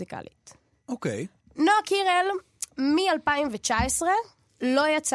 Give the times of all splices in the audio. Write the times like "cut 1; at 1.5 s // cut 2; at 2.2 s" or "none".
none